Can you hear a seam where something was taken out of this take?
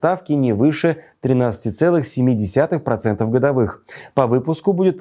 no; 0 cuts

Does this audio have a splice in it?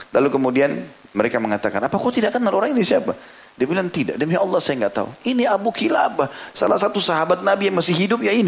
no; 0 cuts

